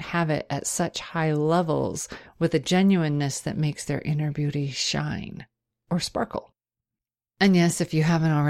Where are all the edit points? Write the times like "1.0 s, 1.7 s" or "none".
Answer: none